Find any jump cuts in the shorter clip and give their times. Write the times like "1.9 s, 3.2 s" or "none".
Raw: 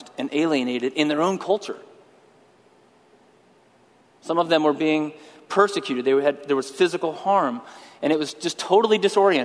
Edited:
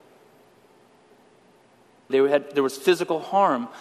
2.1 s